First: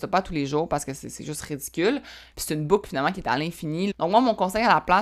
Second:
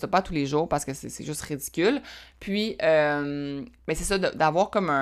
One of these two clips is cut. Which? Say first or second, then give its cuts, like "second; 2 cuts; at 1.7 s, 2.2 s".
first; 2 cuts; at 2.3 s, 3.9 s